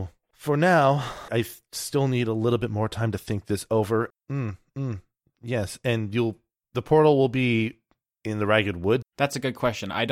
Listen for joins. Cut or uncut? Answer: cut